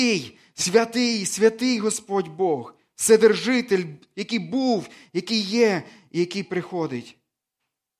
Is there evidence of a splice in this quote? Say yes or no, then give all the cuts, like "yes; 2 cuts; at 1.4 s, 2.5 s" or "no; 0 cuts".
no; 0 cuts